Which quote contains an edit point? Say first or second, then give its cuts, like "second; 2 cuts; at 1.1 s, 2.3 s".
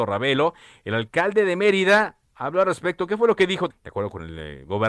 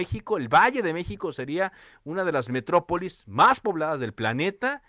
first; 1 cut; at 3.7 s